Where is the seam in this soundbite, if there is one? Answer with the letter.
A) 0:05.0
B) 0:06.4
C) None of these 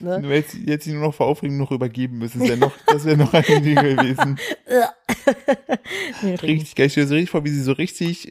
B